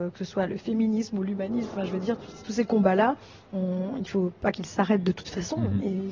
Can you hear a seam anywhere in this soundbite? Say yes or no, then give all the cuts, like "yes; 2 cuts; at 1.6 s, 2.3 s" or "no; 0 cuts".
no; 0 cuts